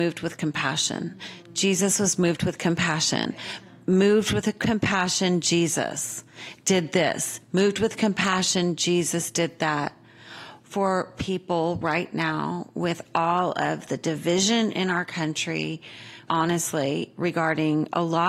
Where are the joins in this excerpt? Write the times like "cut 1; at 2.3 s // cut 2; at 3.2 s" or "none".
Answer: cut 1; at 10.6 s // cut 2; at 16.3 s